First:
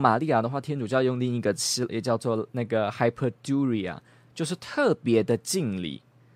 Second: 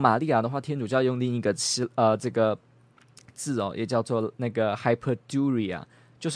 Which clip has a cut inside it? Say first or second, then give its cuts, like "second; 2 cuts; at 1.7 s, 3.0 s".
first; 1 cut; at 1.9 s